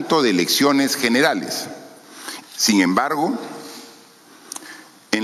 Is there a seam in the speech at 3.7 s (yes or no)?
no